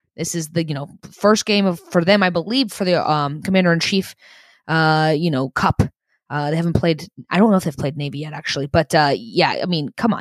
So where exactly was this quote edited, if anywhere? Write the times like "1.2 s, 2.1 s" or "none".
none